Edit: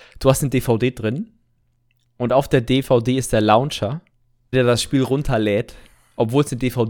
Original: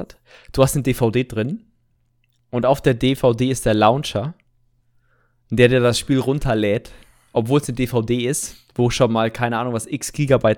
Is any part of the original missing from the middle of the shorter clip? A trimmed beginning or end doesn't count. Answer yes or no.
yes